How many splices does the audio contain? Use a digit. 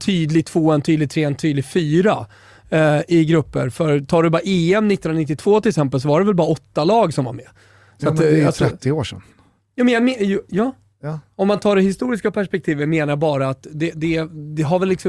0